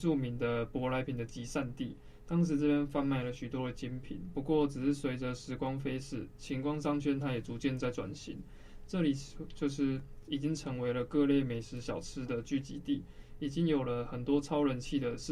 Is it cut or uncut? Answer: uncut